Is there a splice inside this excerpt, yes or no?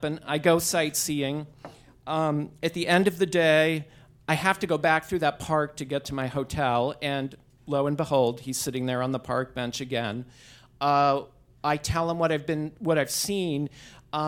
no